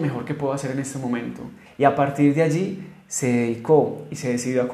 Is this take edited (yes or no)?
yes